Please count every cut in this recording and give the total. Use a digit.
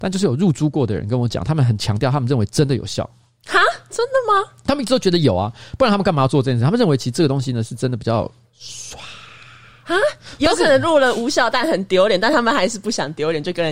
0